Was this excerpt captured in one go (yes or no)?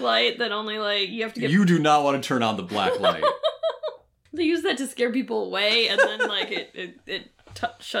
yes